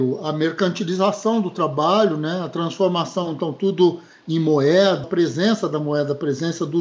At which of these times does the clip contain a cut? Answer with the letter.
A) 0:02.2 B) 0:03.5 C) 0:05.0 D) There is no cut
C